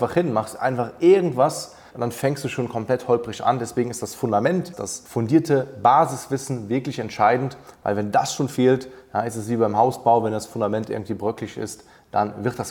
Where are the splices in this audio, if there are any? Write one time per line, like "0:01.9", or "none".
0:01.9